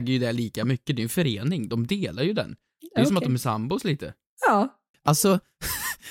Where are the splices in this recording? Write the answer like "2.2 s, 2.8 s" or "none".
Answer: 4.9 s